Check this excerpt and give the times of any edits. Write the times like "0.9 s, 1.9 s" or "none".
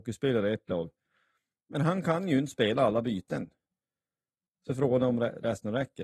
none